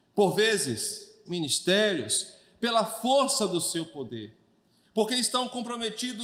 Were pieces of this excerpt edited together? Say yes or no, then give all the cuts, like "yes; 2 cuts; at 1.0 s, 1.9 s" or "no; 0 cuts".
yes; 1 cut; at 1.3 s